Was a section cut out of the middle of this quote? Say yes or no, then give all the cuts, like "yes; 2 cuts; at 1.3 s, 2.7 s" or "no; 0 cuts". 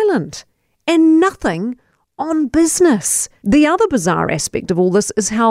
yes; 1 cut; at 3.4 s